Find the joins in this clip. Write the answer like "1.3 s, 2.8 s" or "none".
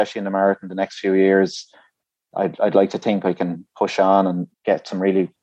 4.5 s